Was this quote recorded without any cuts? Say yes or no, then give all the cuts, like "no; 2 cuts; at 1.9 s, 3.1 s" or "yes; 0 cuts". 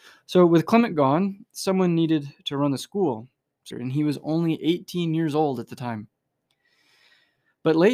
no; 1 cut; at 3.7 s